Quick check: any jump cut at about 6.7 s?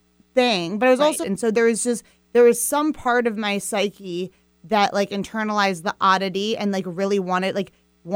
no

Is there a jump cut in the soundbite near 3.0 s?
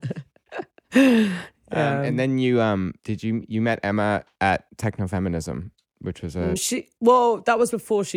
yes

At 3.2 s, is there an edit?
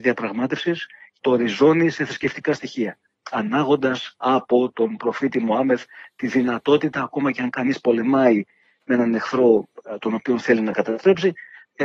no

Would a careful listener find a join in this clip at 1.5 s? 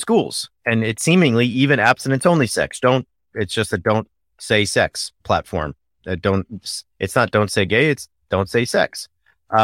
no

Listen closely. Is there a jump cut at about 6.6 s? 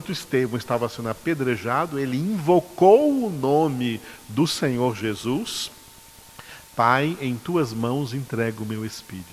yes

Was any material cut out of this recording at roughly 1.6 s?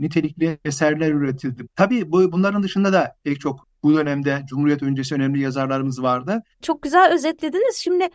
yes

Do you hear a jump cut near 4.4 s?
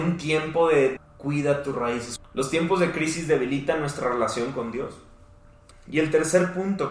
no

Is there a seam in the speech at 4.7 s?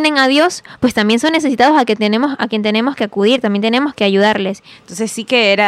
yes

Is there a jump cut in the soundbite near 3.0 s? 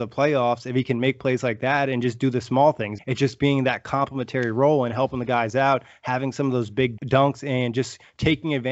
yes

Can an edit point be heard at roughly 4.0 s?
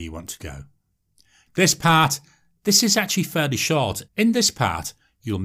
yes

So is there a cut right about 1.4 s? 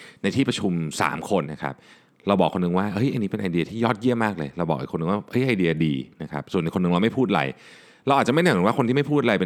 yes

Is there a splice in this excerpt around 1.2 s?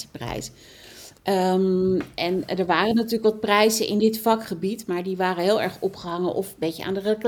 yes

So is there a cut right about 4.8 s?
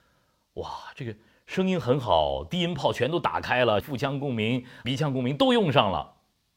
yes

